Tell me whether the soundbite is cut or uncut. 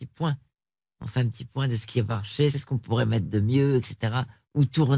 cut